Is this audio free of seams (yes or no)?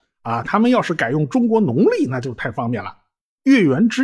yes